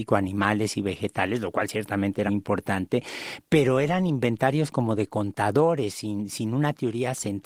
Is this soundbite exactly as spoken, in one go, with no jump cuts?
no; 1 cut; at 2.3 s

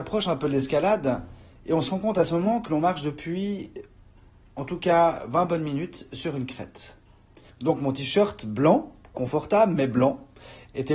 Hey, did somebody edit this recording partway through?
yes; 1 cut; at 7.5 s

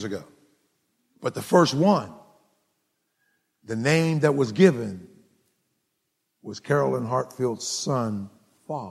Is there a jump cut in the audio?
no; 0 cuts

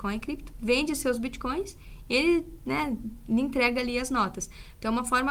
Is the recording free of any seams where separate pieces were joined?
yes; 0 cuts

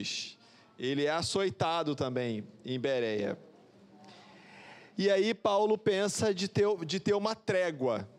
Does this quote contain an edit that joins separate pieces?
no; 0 cuts

